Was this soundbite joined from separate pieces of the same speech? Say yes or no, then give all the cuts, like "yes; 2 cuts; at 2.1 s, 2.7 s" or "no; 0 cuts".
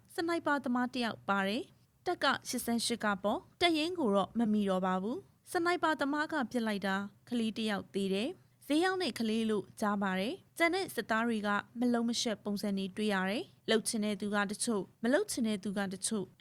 yes; 1 cut; at 4.5 s